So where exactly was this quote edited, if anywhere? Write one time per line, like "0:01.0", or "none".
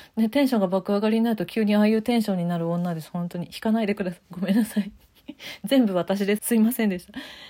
0:06.4